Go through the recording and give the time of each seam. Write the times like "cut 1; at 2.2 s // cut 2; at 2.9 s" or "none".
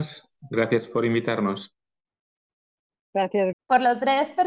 cut 1; at 3.5 s

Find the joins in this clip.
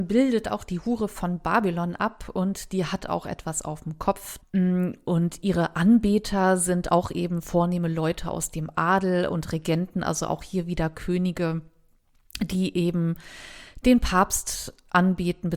cut 1; at 4.4 s

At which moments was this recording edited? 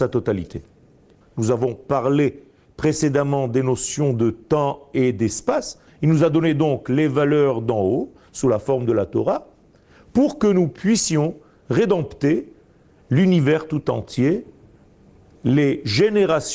cut 1; at 1.2 s // cut 2; at 5.9 s

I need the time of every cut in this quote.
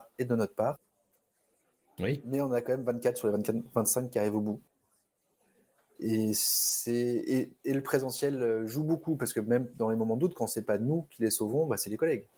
none

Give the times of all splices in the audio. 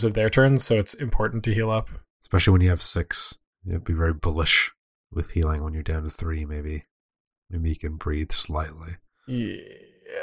none

